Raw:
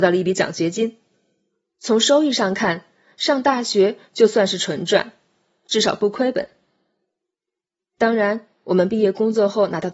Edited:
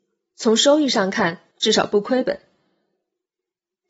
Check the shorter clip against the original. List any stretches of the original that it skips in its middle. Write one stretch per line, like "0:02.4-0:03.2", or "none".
0:02.9-0:05.6